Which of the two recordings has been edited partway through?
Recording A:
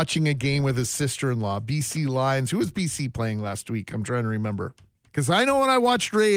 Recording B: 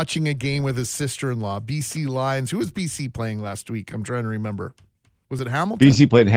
A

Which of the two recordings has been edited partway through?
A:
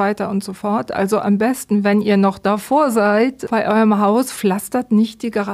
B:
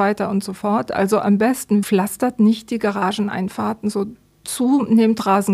B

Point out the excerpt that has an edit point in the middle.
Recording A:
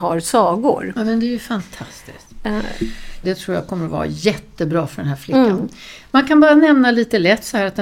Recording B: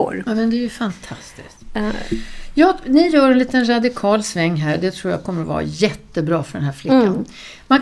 A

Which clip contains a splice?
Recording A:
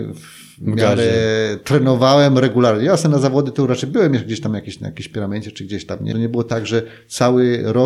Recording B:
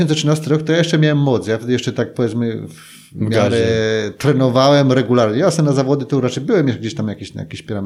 A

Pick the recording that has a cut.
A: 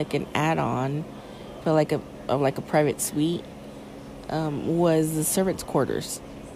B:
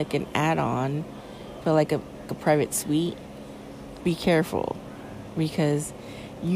B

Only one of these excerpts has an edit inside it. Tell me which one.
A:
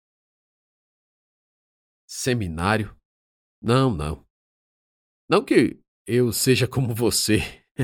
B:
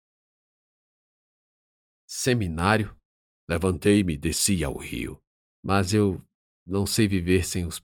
B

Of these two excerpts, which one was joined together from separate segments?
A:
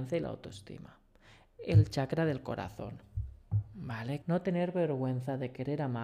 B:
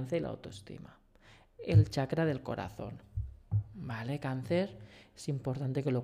A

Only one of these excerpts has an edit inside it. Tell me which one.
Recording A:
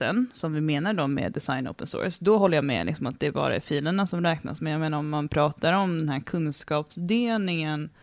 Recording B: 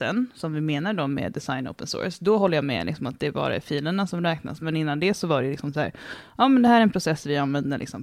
B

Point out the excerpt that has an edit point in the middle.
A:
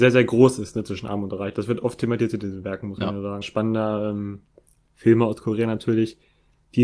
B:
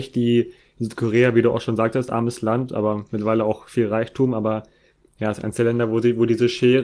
A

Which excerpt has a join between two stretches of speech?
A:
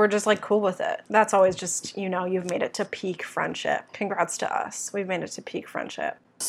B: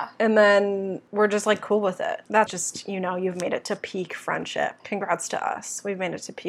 B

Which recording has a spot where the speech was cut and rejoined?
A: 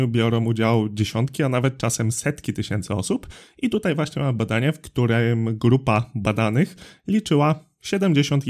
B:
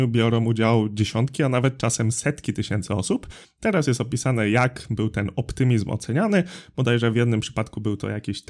B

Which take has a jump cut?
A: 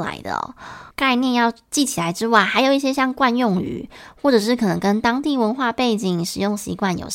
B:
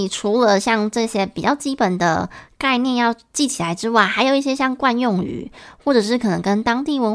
A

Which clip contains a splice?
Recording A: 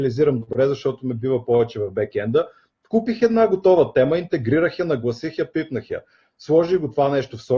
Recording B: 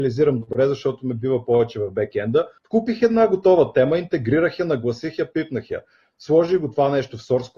B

